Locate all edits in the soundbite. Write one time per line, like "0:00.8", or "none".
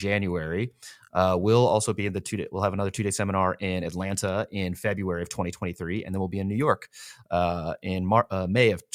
none